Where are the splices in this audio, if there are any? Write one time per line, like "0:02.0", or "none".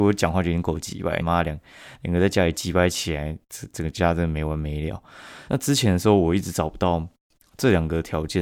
0:01.2
0:05.5